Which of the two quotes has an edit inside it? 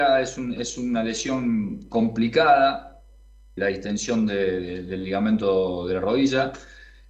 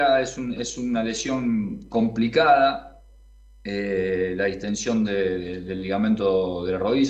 first; 1 cut; at 3.6 s

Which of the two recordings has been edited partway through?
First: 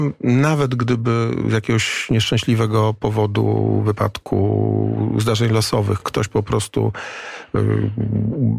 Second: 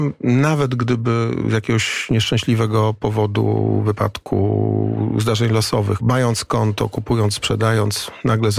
second; 1 cut; at 6.0 s

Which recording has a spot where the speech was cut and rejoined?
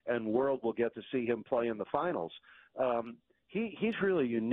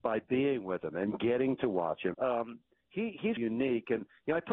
second; 2 cuts; at 2.1 s, 3.4 s

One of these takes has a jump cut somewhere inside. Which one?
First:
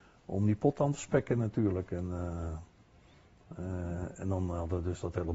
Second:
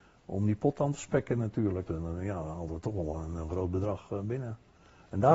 second; 1 cut; at 1.9 s

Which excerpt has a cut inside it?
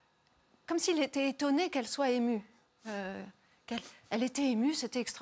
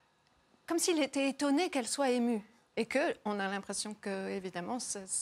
second; 1 cut; at 2.7 s

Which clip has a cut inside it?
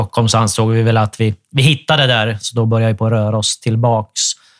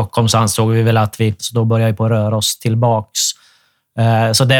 second; 1 cut; at 1.4 s

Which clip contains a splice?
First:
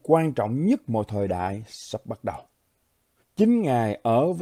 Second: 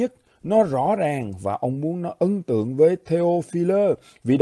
first; 1 cut; at 3.2 s

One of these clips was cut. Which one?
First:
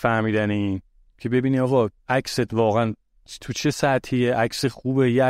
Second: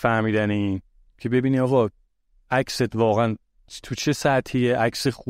first; 1 cut; at 2.0 s

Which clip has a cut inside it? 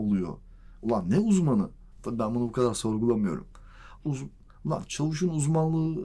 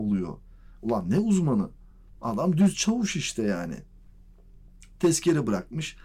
first; 2 cuts; at 1.9 s, 4.0 s

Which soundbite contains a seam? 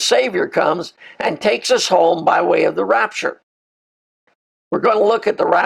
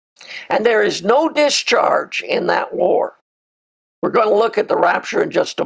second; 1 cut; at 3.9 s

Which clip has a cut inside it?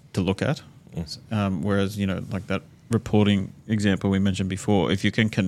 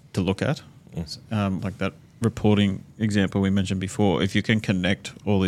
second; 1 cut; at 1.6 s

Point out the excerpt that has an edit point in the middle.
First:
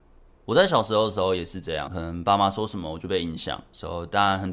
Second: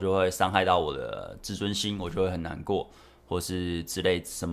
first; 1 cut; at 1.9 s

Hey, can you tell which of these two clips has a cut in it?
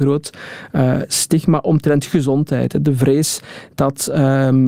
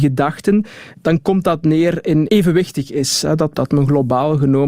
second; 3 cuts; at 0.9 s, 2.3 s, 3.5 s

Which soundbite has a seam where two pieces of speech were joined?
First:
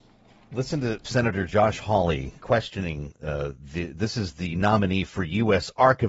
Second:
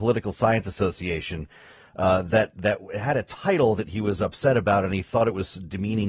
first; 1 cut; at 2.4 s

